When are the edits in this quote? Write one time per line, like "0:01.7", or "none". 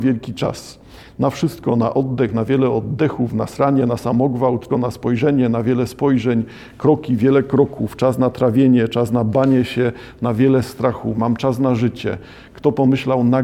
0:04.7